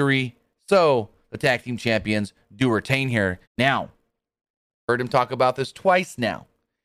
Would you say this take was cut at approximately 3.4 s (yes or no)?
yes